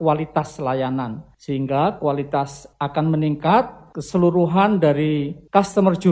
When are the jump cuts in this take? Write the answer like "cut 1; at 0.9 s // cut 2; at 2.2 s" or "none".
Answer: none